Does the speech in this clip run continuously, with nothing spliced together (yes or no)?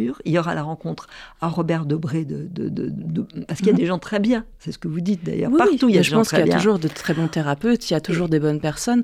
yes